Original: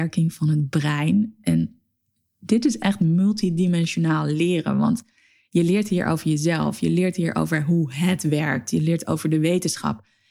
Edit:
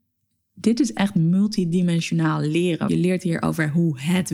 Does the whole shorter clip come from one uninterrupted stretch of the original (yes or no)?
no